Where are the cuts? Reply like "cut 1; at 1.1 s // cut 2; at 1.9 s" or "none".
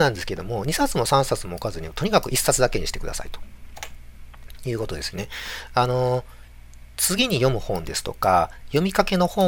none

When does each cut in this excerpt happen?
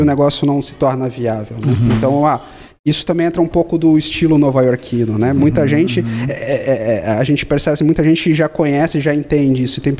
none

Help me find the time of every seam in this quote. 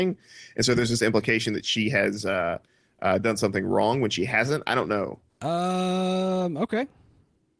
cut 1; at 5.3 s

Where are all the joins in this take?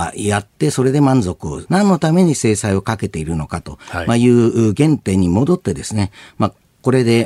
cut 1; at 1.7 s

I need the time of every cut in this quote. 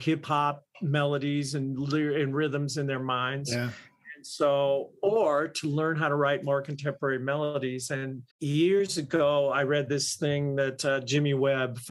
cut 1; at 8.3 s

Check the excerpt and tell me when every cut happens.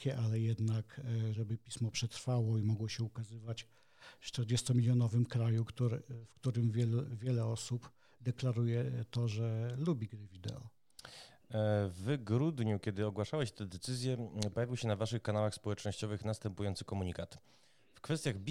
cut 1; at 1.3 s

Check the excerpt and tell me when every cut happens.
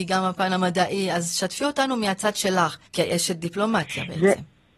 cut 1; at 2.9 s

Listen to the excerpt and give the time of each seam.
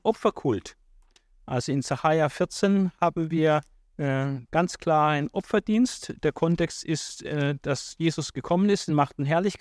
none

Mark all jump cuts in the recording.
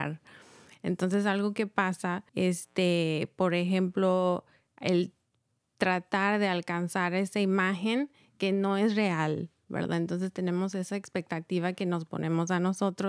cut 1; at 2.3 s

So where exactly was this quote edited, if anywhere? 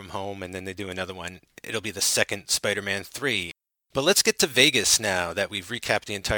none

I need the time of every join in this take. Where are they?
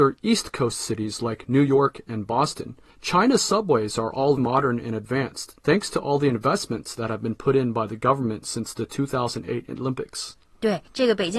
cut 1; at 4.4 s

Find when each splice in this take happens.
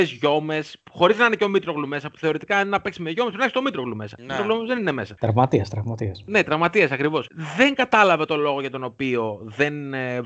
none

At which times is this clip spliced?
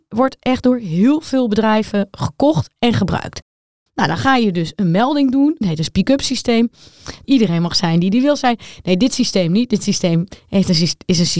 cut 1; at 5.6 s // cut 2; at 7.2 s

